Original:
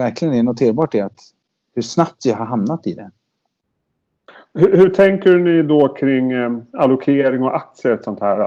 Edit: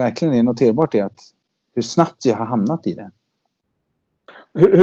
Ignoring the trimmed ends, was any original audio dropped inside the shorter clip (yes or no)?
no